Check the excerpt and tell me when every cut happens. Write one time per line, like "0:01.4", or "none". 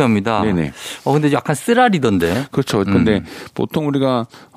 0:02.8